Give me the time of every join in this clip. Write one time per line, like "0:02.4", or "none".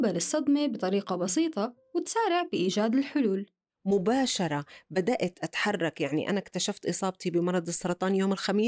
none